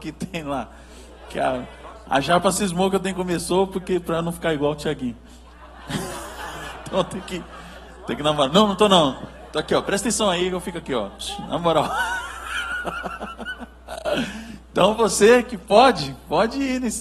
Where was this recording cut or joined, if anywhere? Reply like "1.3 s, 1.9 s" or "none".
none